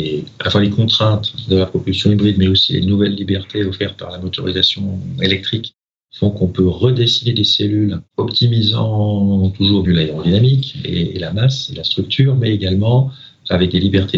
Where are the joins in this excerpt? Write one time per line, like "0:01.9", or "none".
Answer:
0:08.1
0:09.8

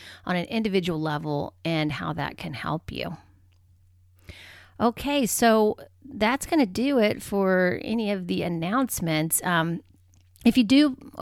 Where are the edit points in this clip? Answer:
none

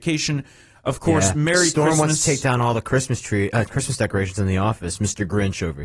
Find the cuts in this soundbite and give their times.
none

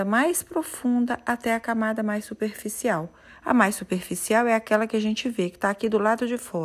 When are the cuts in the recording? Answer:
none

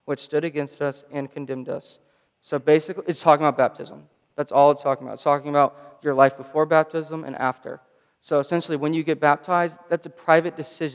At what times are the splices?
0:02.3

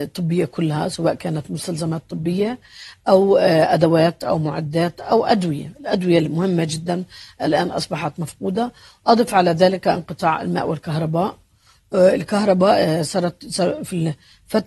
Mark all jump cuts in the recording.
none

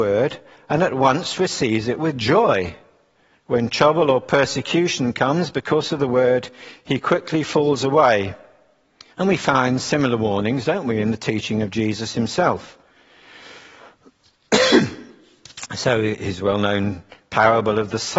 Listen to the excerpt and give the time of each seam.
0:03.3
0:09.1

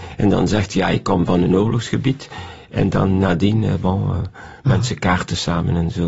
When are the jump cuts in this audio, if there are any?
none

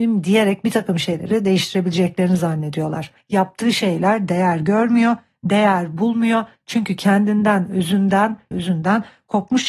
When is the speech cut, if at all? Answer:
0:03.2
0:08.5

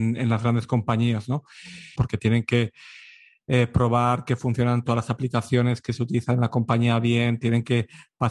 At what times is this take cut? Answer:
0:02.0

